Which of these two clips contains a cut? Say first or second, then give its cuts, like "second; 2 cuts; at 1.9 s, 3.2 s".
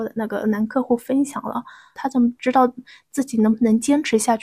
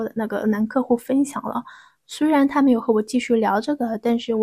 first; 1 cut; at 2.0 s